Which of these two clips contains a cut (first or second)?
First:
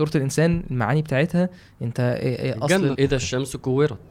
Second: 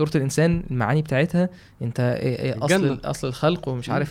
first